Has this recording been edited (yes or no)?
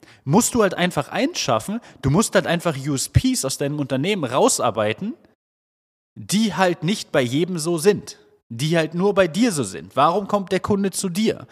no